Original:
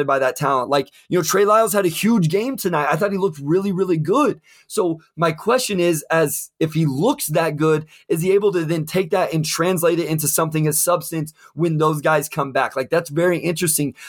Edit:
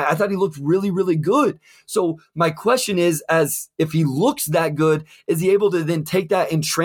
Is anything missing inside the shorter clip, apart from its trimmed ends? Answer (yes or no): no